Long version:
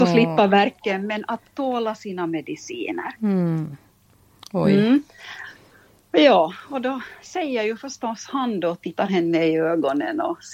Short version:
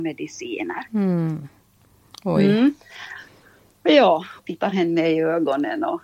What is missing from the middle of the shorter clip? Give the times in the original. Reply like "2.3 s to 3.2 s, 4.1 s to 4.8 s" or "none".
6.7 s to 8.8 s